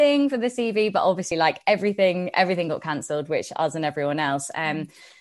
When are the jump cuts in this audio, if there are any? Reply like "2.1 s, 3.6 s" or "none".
none